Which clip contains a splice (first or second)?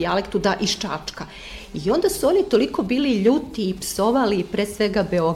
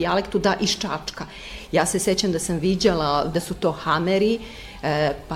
second